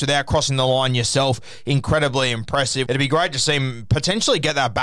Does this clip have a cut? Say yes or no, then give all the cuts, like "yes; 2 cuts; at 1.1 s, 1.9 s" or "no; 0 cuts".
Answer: yes; 1 cut; at 2.9 s